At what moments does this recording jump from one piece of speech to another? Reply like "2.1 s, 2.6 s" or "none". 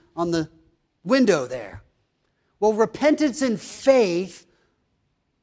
none